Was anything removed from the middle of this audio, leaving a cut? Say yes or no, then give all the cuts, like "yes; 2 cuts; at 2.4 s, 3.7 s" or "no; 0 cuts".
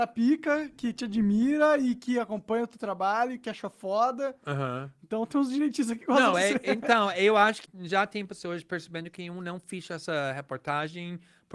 yes; 2 cuts; at 6.3 s, 7.7 s